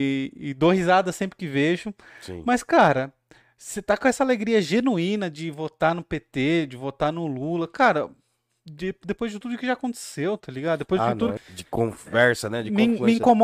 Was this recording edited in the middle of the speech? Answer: yes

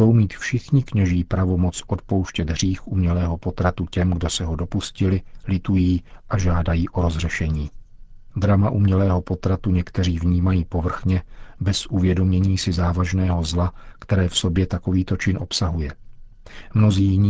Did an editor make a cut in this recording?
yes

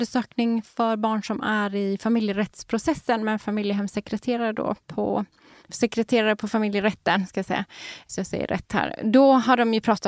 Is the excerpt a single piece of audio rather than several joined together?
yes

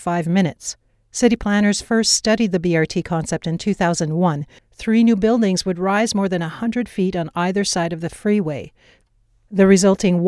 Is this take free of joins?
no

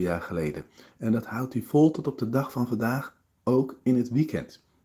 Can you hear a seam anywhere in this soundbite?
no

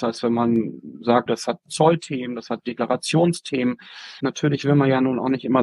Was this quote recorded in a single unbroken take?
no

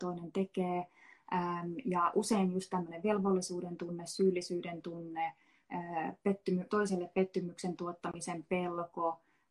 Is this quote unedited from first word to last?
yes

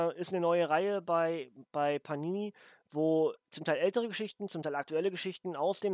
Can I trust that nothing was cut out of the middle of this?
yes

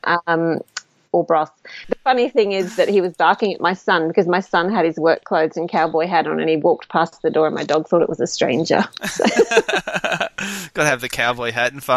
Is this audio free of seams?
no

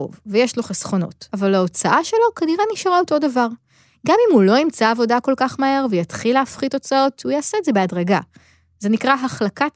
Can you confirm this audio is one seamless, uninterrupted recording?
no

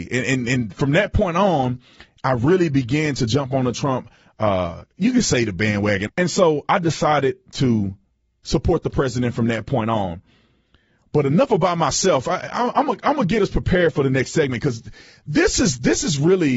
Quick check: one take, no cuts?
no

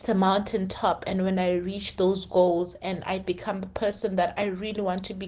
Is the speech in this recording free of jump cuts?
yes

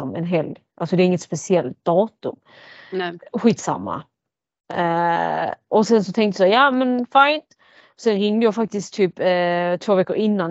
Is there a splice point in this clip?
no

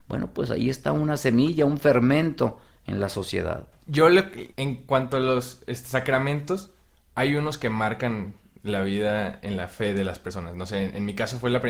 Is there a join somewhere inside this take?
yes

